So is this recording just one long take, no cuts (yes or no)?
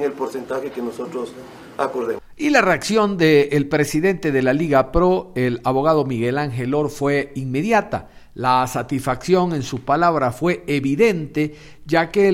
yes